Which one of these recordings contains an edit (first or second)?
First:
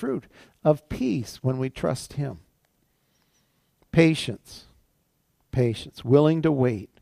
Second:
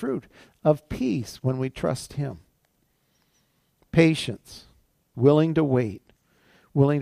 second